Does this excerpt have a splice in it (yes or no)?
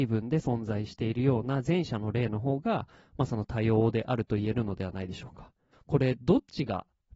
yes